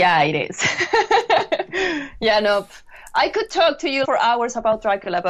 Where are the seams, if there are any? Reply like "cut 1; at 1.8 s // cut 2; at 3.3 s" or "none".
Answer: cut 1; at 4.0 s